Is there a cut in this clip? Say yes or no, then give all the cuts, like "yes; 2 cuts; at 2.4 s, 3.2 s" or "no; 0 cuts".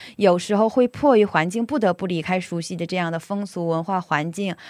no; 0 cuts